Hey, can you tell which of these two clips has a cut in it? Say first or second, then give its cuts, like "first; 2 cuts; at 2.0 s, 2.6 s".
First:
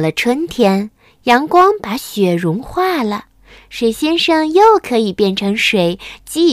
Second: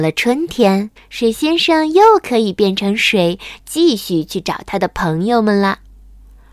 second; 1 cut; at 1.0 s